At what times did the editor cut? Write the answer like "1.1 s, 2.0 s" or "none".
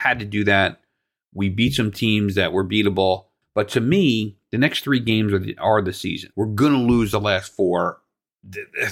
3.4 s, 6.3 s